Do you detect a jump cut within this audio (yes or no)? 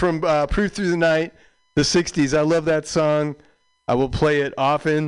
no